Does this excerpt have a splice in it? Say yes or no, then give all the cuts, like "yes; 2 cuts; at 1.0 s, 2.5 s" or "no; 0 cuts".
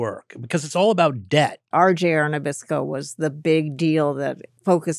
yes; 1 cut; at 1.7 s